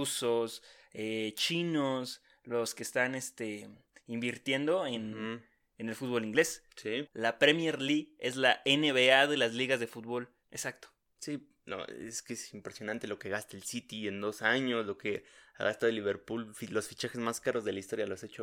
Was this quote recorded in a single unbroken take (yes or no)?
no